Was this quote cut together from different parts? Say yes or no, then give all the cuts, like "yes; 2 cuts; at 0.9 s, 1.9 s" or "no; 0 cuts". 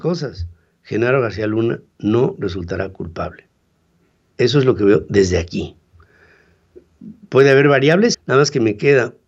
yes; 1 cut; at 8.1 s